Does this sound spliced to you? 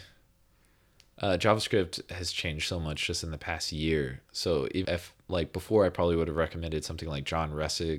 yes; 1 cut; at 4.8 s

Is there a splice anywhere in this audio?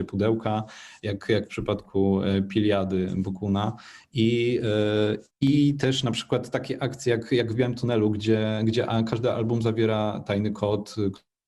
yes; 1 cut; at 5.3 s

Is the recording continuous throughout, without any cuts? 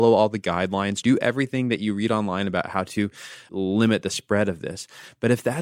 no; 1 cut; at 1.0 s

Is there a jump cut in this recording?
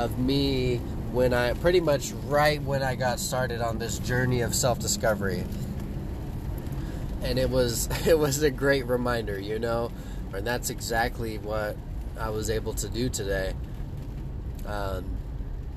yes; 1 cut; at 10.3 s

